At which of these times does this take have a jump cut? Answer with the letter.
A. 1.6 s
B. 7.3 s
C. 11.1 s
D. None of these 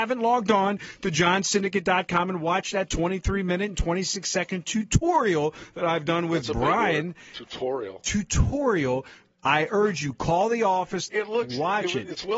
C